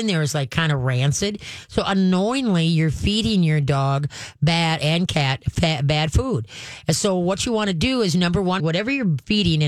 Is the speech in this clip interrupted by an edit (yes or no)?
yes